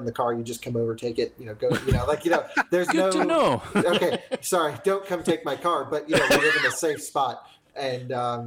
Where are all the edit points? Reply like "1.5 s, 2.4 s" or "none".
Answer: none